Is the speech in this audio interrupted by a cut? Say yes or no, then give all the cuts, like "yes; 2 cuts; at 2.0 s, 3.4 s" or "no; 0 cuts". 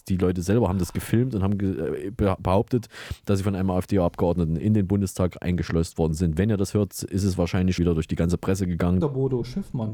yes; 2 cuts; at 7.8 s, 9.0 s